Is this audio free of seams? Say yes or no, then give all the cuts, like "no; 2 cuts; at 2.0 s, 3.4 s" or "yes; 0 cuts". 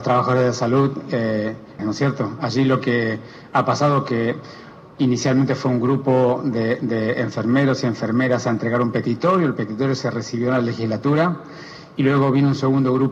no; 1 cut; at 1.8 s